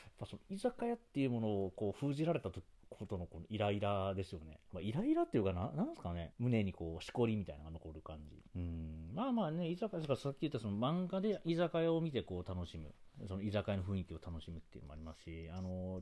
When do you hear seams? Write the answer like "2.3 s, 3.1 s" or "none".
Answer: 6.3 s, 8.5 s